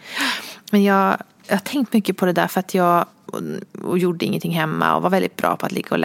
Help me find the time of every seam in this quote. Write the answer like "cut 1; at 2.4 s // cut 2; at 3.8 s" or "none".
cut 1; at 3.3 s